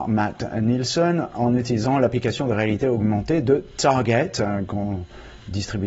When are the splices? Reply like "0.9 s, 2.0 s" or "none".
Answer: none